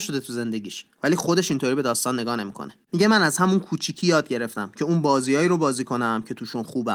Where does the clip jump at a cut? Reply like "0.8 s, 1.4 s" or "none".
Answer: 0.9 s, 2.9 s